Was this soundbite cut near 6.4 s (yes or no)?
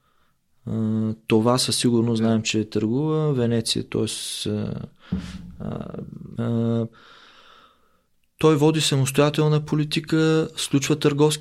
yes